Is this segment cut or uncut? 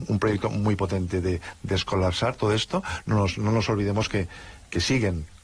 uncut